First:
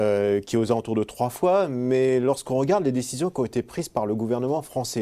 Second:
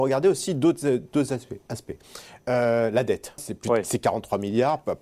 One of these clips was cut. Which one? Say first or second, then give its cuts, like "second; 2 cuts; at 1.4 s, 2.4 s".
second; 1 cut; at 3.4 s